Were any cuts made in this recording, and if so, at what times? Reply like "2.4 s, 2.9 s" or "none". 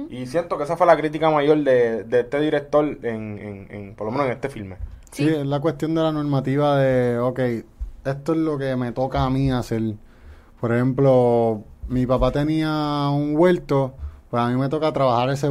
none